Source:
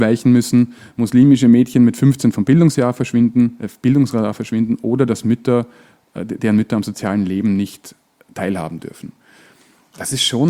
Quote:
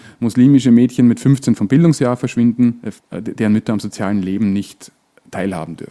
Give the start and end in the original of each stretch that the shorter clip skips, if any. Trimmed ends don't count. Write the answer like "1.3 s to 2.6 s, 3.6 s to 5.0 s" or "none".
3.7 s to 6.0 s